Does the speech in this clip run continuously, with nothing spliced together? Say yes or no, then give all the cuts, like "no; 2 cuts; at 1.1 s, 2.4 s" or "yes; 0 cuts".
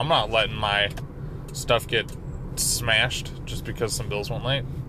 yes; 0 cuts